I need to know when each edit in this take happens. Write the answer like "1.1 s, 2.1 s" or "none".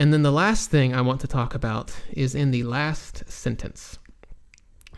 none